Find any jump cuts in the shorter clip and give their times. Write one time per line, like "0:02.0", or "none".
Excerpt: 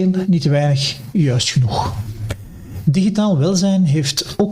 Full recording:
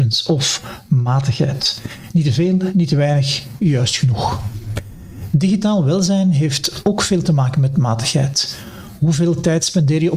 none